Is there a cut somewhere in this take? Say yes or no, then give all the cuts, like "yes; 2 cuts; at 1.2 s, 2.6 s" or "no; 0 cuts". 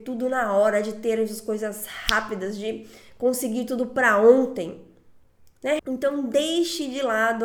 yes; 1 cut; at 5.8 s